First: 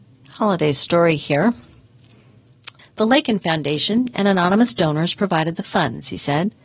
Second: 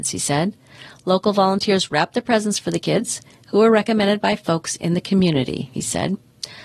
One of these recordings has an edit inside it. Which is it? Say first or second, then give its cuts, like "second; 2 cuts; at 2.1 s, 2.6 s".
first; 1 cut; at 2.8 s